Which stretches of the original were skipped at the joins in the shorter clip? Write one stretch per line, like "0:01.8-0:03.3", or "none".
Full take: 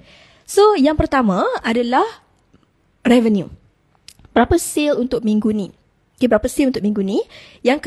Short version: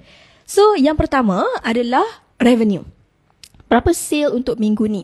0:02.3-0:03.0